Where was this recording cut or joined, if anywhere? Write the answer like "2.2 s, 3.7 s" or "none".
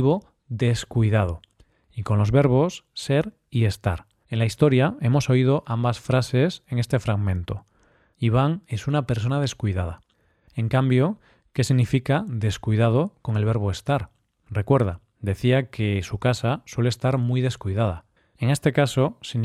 4.2 s, 8.1 s